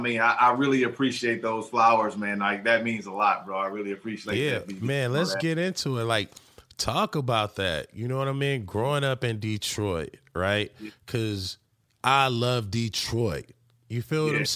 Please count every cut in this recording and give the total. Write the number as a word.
zero